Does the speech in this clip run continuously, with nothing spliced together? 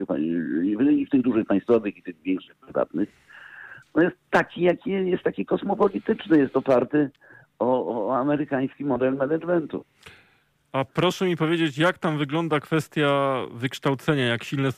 yes; 0 cuts

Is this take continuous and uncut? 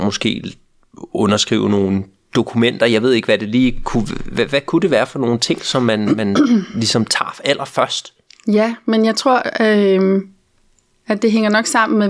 yes; 0 cuts

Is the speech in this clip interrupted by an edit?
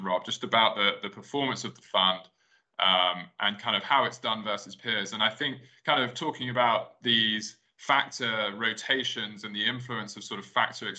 no; 0 cuts

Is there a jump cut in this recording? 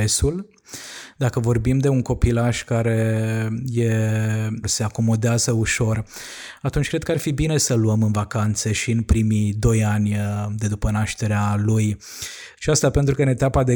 yes; 2 cuts; at 4.6 s, 12.6 s

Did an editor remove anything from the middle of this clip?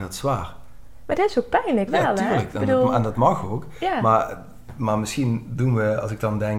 yes; 1 cut; at 1.9 s

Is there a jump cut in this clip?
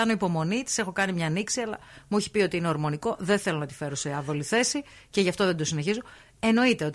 no; 0 cuts

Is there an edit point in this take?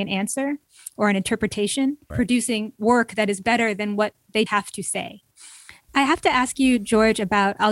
yes; 3 cuts; at 2.1 s, 4.5 s, 5.9 s

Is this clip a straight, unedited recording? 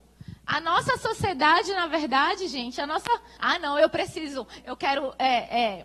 no; 2 cuts; at 3.4 s, 4.6 s

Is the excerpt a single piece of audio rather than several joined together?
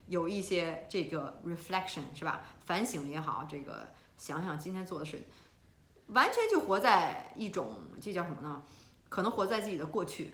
yes; 0 cuts

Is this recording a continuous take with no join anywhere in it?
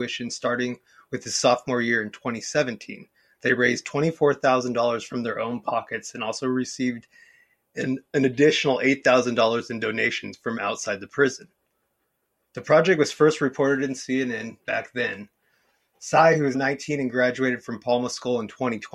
no; 1 cut; at 16.5 s

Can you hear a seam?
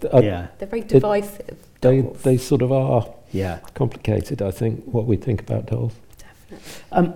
no; 0 cuts

